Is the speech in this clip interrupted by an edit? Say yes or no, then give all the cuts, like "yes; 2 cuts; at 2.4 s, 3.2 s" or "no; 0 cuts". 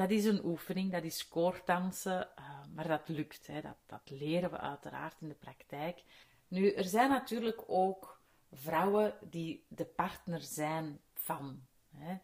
no; 0 cuts